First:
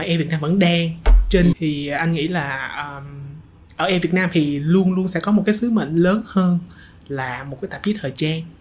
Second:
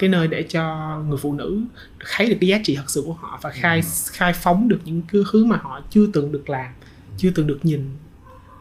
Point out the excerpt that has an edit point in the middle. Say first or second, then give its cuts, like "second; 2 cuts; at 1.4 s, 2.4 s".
first; 1 cut; at 1.5 s